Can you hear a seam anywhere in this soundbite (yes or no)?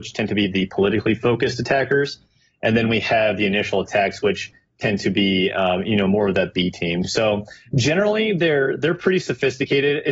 no